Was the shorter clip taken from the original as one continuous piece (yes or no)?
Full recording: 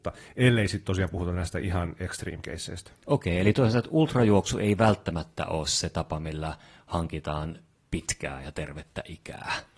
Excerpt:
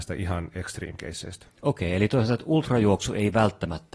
yes